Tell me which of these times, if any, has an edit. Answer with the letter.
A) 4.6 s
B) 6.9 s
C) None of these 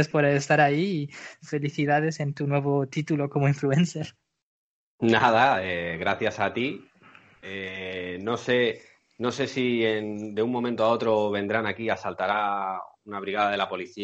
C